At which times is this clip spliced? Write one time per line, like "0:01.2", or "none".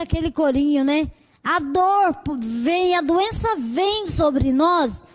0:01.3